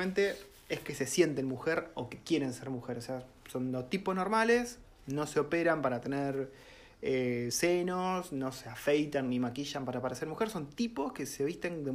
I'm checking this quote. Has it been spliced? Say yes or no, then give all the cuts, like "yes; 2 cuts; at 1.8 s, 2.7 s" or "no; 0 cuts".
no; 0 cuts